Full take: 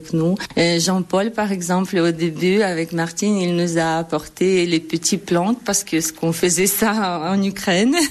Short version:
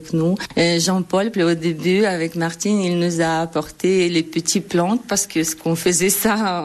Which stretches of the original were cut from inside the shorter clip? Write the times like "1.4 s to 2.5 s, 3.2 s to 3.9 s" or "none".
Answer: 1.3 s to 1.9 s

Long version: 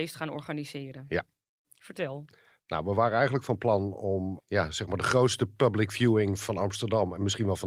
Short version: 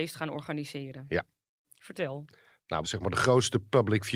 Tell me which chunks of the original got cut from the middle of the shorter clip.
2.8 s to 4.7 s

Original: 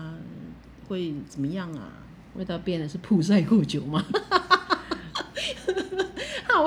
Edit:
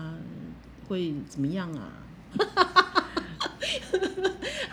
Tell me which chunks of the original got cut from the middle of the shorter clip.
2.3 s to 4.1 s

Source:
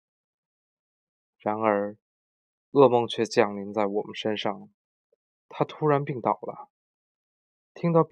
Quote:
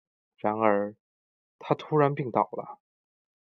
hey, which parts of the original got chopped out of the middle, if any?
2.4 s to 5.3 s

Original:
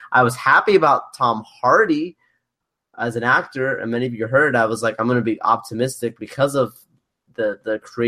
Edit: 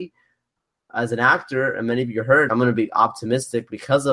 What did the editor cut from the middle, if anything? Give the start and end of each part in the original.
4.5 s to 5.0 s

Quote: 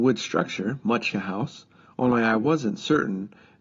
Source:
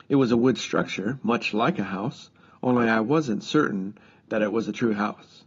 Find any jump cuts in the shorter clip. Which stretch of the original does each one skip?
1.5 s to 1.8 s

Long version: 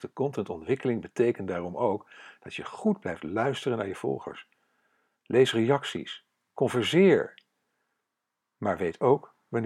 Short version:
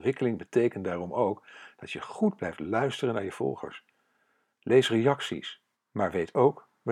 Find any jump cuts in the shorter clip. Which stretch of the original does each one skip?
6.4 s to 8.4 s

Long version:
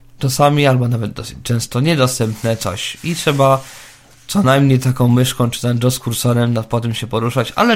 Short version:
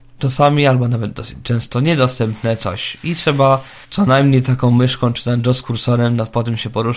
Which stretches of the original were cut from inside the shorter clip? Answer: 3.8 s to 4.2 s

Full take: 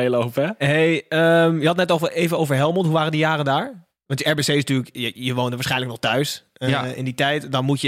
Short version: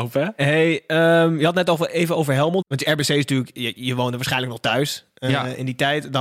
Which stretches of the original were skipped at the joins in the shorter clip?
2.8 s to 4.0 s

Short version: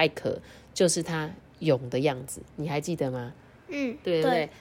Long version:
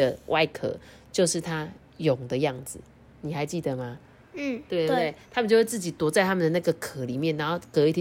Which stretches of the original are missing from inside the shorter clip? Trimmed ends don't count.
2.9 s to 3.1 s

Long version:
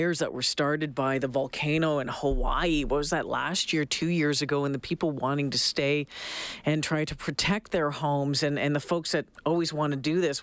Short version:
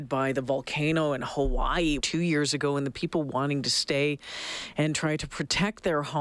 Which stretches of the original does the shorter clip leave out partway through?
2.8 s to 3.9 s

